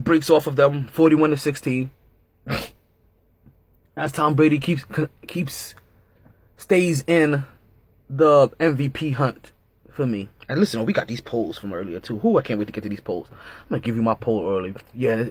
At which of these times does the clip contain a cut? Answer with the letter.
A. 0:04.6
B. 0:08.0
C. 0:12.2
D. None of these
D